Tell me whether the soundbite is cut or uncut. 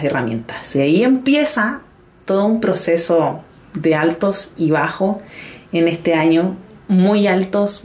uncut